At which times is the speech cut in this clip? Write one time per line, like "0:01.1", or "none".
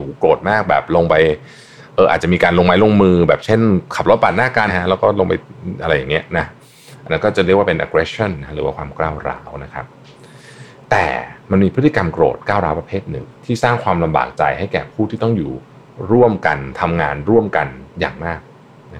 0:04.7
0:13.4